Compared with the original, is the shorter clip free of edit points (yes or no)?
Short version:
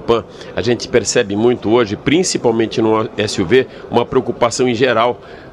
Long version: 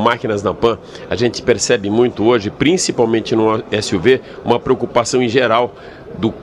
yes